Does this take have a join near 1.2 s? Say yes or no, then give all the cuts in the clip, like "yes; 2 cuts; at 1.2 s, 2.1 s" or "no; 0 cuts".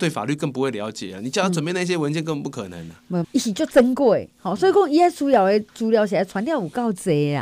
no; 1 cut; at 3.2 s